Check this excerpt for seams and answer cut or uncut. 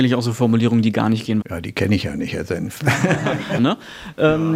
cut